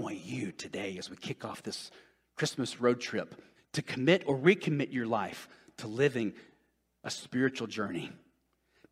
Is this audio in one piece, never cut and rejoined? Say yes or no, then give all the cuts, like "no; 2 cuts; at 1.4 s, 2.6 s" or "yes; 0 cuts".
no; 1 cut; at 3.5 s